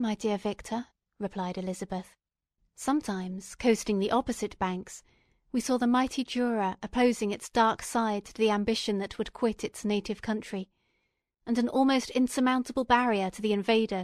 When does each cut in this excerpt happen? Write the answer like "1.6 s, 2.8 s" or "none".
2.6 s